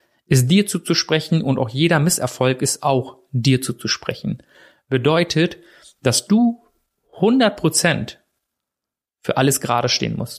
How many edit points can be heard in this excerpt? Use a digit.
0